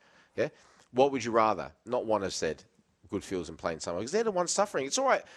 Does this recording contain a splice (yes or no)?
yes